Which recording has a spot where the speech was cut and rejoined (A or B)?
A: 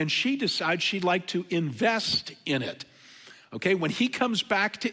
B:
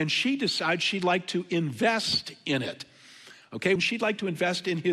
B